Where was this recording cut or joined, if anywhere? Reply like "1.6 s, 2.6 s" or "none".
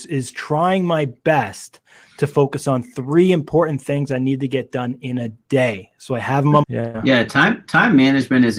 6.6 s

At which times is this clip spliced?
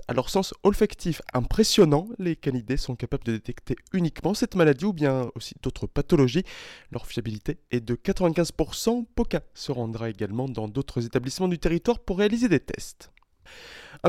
none

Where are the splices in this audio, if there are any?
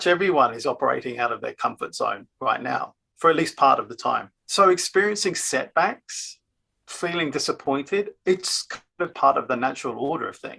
4.4 s, 9.1 s

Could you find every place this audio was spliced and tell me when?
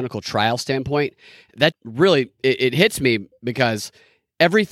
1.7 s

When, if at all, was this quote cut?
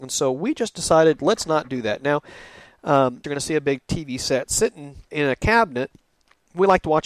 3.2 s, 5.1 s

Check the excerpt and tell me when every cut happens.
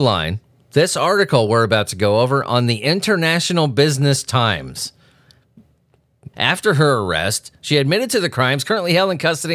6.3 s

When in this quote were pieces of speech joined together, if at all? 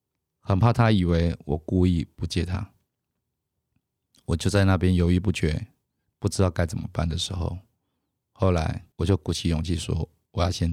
8.9 s

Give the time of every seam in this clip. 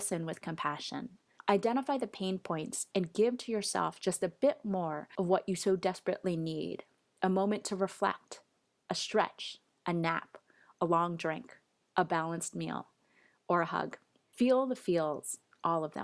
14.2 s

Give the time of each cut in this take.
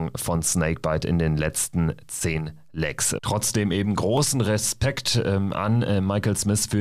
3.2 s

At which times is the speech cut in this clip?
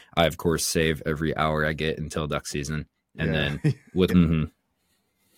4.1 s

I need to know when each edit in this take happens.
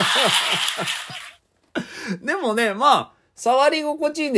none

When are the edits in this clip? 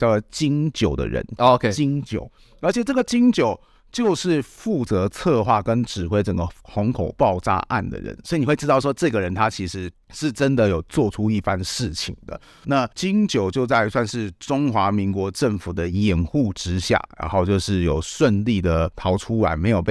1.4 s, 12.6 s

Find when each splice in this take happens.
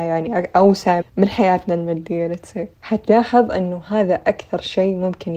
1.0 s, 2.7 s

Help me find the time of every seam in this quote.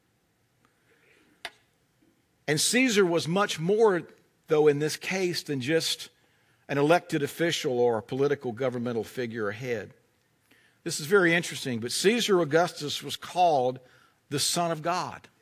none

